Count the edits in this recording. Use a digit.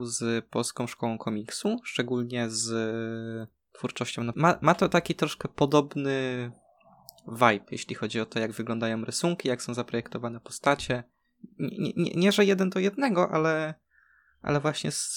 1